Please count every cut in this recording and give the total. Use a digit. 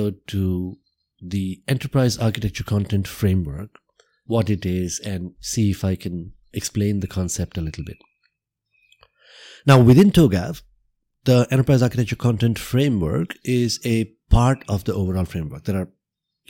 0